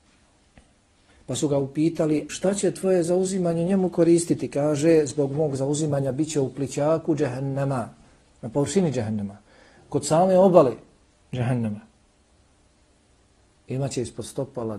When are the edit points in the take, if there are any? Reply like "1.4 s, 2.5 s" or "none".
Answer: 1.1 s, 2.3 s